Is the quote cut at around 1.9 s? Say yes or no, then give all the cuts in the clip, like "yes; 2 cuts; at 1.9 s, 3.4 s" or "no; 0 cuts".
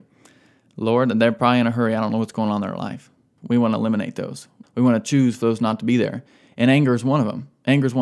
no; 2 cuts; at 3.4 s, 4.6 s